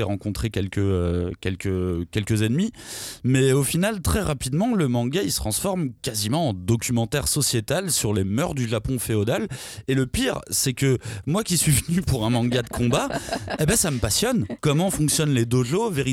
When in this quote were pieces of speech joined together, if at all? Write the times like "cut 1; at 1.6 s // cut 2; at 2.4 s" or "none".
none